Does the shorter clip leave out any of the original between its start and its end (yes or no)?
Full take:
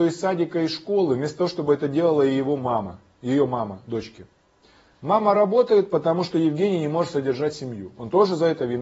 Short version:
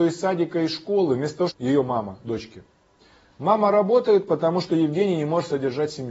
yes